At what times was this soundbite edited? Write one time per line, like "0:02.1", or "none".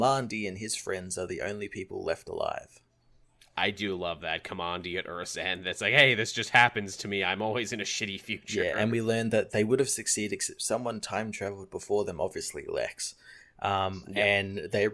none